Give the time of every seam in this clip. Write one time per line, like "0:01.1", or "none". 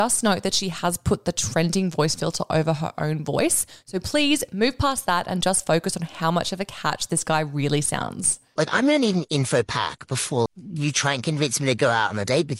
0:08.6
0:10.5